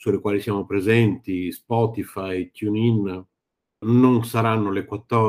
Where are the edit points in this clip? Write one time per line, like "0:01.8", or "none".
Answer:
0:03.8